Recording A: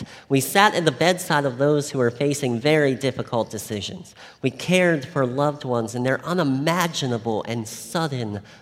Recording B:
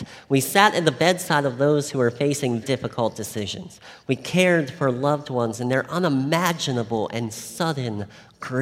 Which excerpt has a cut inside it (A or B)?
B